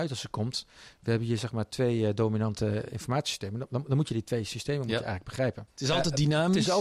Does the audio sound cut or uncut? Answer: cut